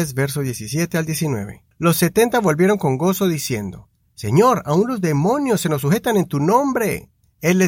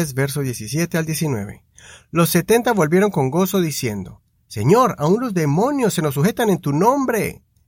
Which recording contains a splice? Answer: first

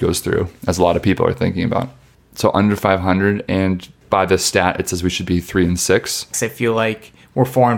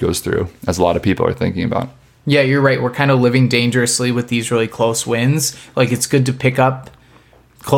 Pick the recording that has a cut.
first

